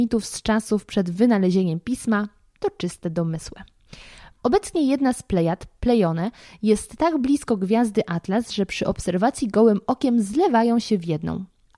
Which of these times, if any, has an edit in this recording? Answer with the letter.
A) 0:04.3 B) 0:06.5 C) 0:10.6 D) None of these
A